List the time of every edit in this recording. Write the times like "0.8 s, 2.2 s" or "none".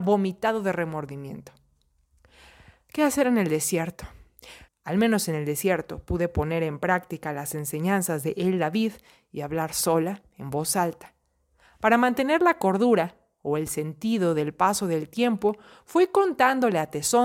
4.7 s